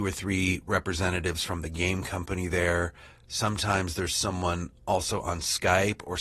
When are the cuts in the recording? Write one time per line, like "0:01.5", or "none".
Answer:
none